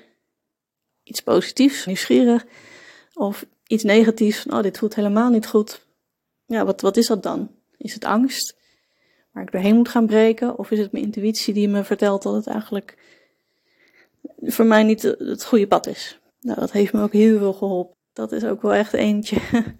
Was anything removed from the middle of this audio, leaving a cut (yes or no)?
yes